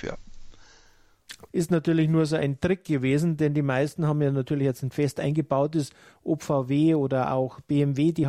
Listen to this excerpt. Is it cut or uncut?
cut